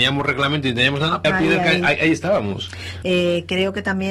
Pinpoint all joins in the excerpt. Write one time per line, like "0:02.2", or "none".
0:01.2
0:03.0